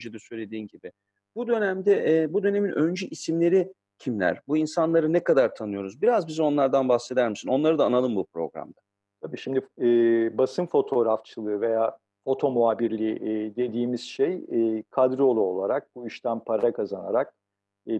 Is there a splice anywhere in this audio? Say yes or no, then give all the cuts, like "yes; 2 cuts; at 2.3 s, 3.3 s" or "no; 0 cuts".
no; 0 cuts